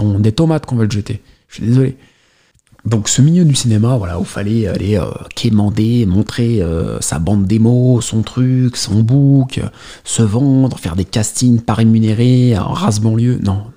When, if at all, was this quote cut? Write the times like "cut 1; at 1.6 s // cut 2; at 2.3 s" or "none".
none